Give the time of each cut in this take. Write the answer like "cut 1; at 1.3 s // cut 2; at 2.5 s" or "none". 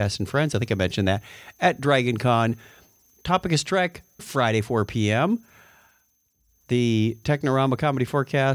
cut 1; at 4.2 s